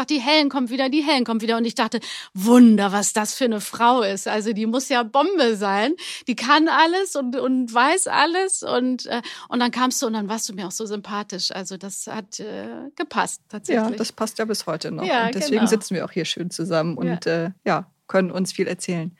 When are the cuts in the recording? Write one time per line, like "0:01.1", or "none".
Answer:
none